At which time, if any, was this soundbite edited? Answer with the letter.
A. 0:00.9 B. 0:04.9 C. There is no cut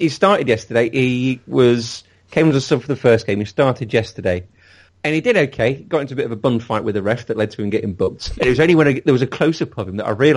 B